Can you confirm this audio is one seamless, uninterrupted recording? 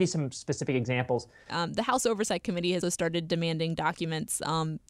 no; 2 cuts; at 1.5 s, 2.8 s

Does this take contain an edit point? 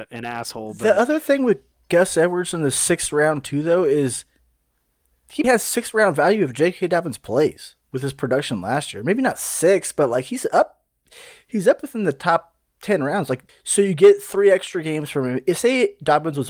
yes; 3 cuts; at 5.4 s, 7.8 s, 13.5 s

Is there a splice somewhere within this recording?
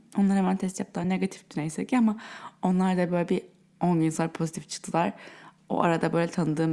no; 0 cuts

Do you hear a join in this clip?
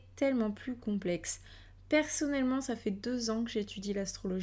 no; 0 cuts

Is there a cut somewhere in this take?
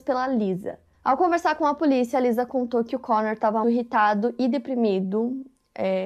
yes; 1 cut; at 3.6 s

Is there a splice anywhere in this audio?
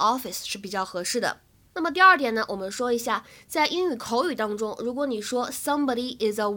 no; 0 cuts

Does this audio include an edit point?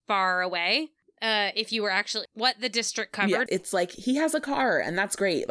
yes; 2 cuts; at 2.3 s, 3.5 s

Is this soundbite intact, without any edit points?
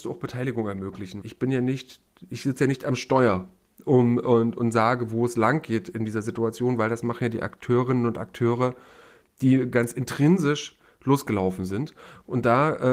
no; 1 cut; at 1.2 s

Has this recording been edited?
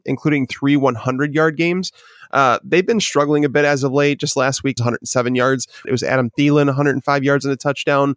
yes; 2 cuts; at 4.8 s, 5.8 s

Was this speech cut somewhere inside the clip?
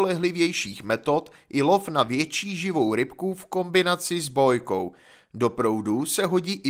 no; 0 cuts

